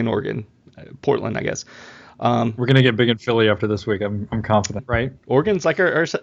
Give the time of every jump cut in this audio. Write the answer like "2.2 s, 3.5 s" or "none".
4.8 s